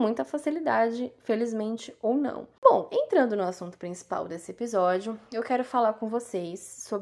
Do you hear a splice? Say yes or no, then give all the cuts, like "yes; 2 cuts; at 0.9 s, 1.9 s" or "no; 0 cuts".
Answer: no; 0 cuts